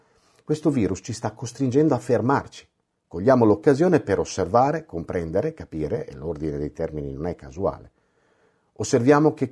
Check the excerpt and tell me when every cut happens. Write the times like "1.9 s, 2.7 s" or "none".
none